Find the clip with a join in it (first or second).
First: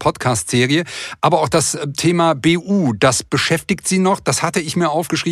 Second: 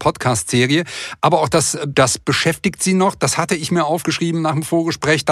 second